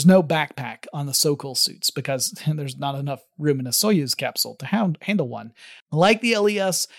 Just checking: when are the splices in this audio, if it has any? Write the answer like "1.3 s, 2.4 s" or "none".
5.8 s